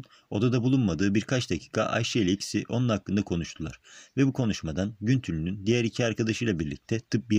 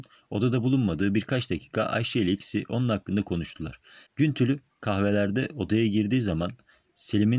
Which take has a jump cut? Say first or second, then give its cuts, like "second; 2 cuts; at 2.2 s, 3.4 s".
second; 1 cut; at 4.1 s